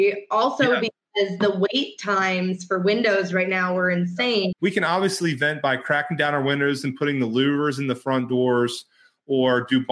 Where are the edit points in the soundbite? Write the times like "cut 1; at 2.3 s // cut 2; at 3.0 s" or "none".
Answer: cut 1; at 4.5 s